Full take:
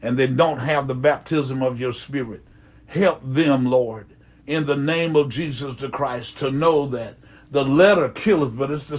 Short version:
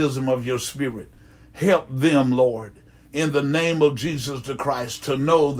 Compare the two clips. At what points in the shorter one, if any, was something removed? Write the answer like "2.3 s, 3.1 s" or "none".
none